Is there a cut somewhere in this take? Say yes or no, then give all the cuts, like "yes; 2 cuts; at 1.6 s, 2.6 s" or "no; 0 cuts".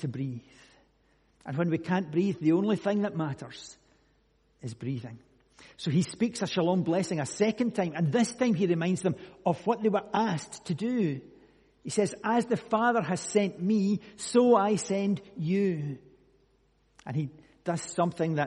no; 0 cuts